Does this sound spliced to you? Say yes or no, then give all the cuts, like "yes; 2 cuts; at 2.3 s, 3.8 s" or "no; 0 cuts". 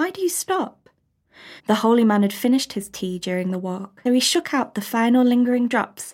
yes; 2 cuts; at 1.6 s, 4.1 s